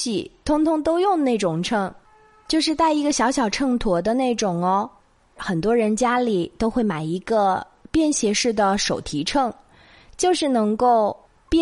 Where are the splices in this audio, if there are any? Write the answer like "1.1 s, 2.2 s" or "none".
5.4 s